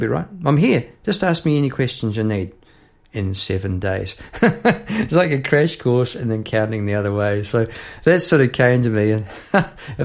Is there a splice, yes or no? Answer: no